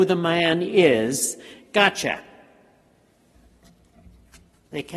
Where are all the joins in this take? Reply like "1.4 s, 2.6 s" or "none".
1.5 s